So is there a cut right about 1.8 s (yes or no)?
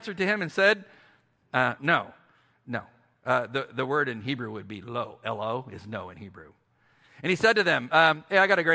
yes